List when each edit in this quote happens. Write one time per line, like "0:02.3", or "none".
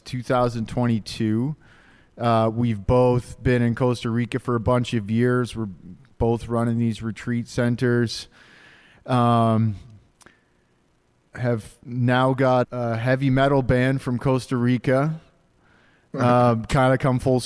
0:11.3
0:12.6